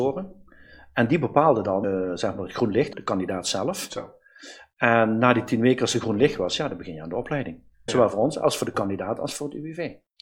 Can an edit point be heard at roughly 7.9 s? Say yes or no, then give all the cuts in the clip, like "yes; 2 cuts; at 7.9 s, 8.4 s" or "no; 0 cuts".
yes; 3 cuts; at 1.8 s, 2.9 s, 7.9 s